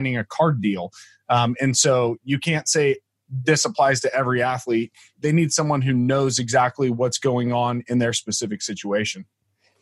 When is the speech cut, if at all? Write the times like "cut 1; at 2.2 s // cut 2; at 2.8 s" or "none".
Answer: cut 1; at 5.2 s